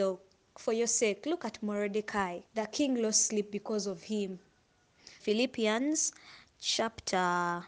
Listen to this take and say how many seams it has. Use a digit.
2